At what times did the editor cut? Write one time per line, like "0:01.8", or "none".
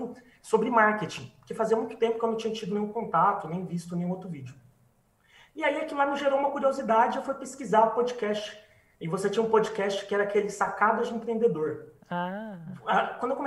none